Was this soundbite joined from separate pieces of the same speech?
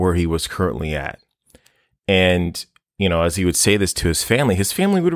no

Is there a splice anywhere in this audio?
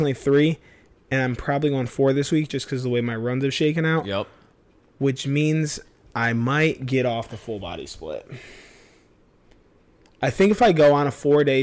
no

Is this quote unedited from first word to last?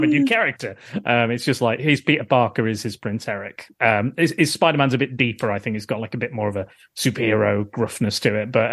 yes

